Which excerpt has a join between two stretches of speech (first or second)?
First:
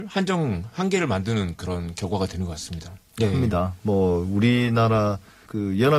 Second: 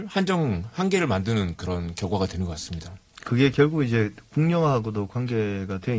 first